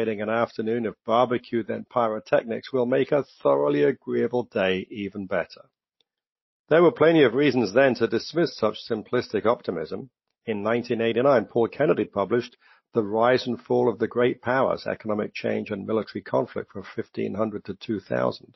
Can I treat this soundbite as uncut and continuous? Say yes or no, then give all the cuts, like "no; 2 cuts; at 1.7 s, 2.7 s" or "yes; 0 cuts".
no; 1 cut; at 6.5 s